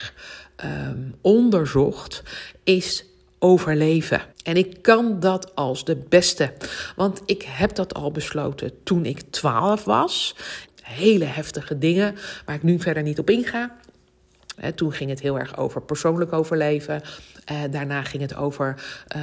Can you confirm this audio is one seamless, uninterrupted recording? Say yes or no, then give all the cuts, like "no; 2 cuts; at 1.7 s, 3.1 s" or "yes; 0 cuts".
no; 3 cuts; at 4.3 s, 10.7 s, 14.5 s